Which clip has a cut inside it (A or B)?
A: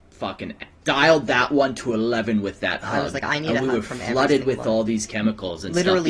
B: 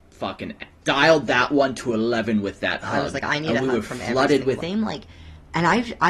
B